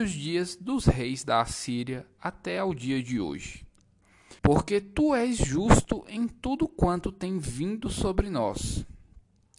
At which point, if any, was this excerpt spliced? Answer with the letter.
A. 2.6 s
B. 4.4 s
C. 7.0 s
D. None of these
B